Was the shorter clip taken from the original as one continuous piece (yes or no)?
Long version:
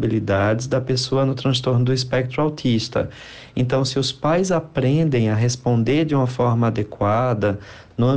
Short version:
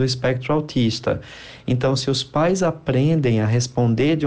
yes